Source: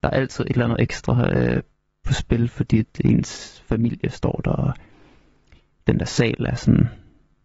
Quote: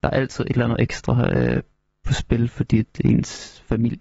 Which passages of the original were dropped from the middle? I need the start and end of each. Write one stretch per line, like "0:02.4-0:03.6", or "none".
none